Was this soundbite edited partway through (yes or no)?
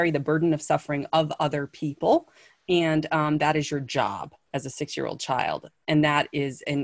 no